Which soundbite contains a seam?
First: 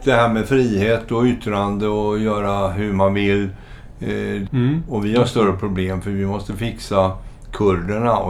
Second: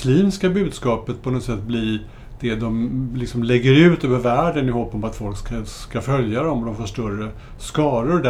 first; 1 cut; at 4.5 s

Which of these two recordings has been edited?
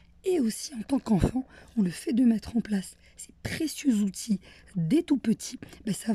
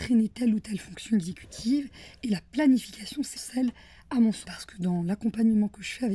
second; 2 cuts; at 3.4 s, 4.4 s

